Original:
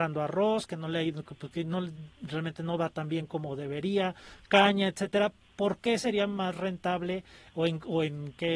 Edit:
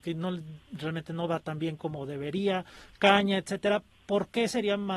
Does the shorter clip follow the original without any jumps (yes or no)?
yes